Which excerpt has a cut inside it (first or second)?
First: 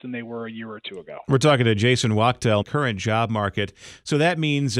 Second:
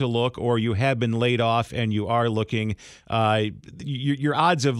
first